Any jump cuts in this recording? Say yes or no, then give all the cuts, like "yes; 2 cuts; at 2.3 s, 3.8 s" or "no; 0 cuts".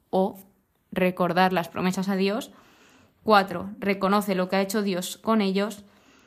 no; 0 cuts